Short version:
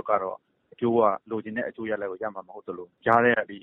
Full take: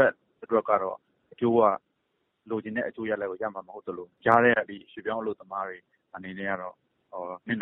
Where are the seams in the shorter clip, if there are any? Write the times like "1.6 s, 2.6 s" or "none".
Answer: 1.2 s